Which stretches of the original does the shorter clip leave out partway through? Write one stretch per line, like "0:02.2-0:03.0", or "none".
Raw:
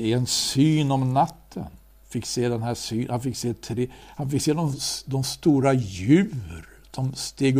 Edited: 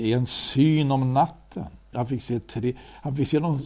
0:01.9-0:03.1